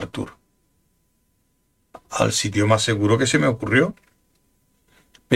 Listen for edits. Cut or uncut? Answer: uncut